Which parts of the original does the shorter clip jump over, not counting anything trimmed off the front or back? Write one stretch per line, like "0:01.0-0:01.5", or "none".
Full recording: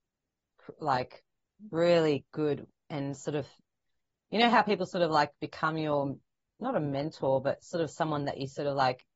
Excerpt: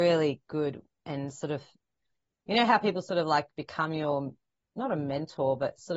none